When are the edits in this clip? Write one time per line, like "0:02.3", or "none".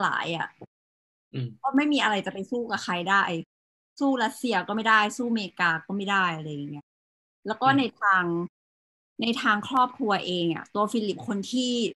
none